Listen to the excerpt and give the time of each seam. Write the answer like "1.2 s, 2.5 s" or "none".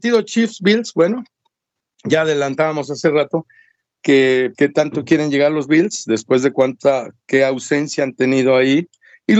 4.6 s